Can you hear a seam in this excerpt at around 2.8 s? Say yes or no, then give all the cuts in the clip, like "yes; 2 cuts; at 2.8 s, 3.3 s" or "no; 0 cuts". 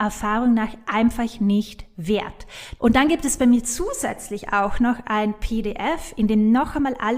yes; 1 cut; at 2.8 s